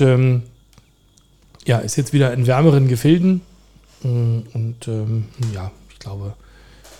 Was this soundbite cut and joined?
no; 0 cuts

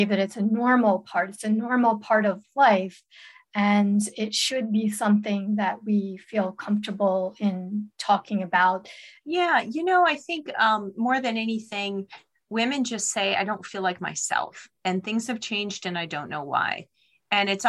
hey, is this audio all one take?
no; 1 cut; at 9.2 s

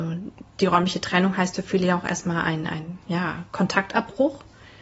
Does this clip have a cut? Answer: yes; 1 cut; at 3.0 s

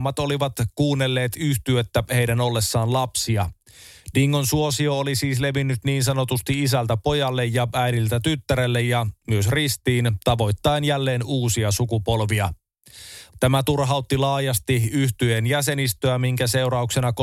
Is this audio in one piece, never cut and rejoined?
no; 1 cut; at 13.3 s

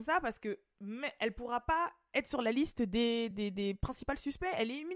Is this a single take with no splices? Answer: yes; 0 cuts

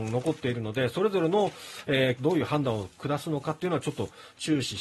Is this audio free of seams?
no; 1 cut; at 2.2 s

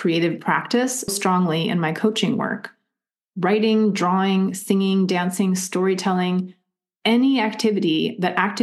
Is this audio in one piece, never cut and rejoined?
no; 1 cut; at 1.1 s

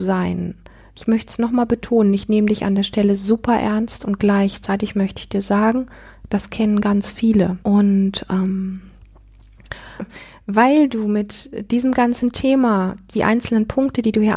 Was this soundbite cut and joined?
yes; 2 cuts; at 7.6 s, 10.0 s

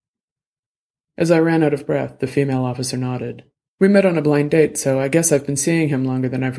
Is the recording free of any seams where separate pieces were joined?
no; 1 cut; at 3.7 s

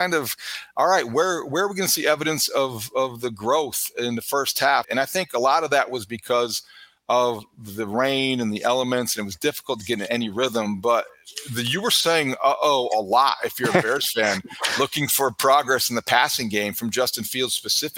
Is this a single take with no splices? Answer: no; 1 cut; at 4.8 s

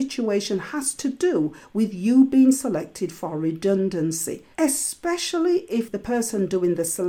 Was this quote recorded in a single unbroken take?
no; 1 cut; at 4.5 s

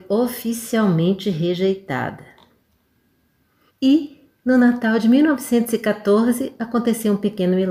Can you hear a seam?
yes; 1 cut; at 3.7 s

